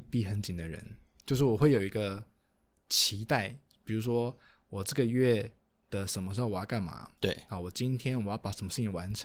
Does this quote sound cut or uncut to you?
uncut